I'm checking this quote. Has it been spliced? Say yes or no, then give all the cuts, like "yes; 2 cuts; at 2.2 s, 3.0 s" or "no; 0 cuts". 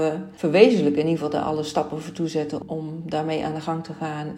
no; 0 cuts